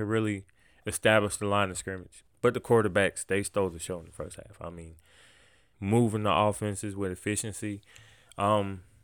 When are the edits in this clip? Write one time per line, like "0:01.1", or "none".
0:02.3
0:05.7